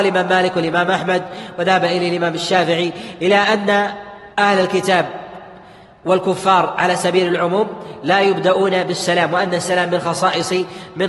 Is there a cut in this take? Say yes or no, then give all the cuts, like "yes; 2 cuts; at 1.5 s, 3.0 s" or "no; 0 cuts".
yes; 1 cut; at 4.3 s